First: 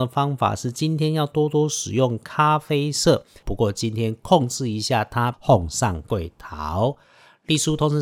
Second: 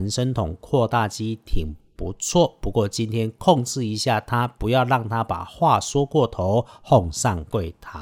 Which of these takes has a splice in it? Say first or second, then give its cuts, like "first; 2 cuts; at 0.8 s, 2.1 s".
first; 2 cuts; at 3.4 s, 5.3 s